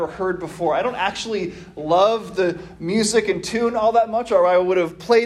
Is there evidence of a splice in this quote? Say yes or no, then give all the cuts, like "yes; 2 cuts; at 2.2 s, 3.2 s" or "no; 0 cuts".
no; 0 cuts